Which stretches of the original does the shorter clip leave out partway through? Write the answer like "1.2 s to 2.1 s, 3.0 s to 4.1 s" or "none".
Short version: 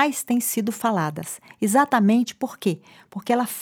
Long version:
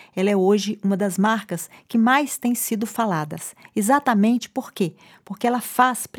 none